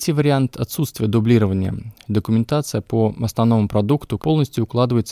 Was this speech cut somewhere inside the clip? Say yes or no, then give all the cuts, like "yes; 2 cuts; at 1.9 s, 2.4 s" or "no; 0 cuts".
yes; 1 cut; at 4.2 s